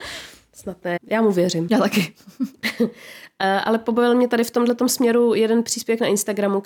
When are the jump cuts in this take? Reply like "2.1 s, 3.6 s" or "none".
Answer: 1.0 s